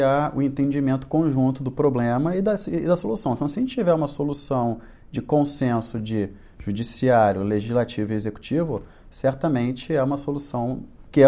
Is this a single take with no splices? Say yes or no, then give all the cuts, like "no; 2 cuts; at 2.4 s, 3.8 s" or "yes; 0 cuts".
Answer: yes; 0 cuts